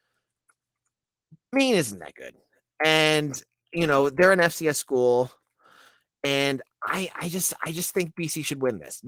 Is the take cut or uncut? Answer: uncut